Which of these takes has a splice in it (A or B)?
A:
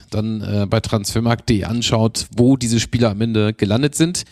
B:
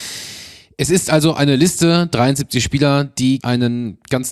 B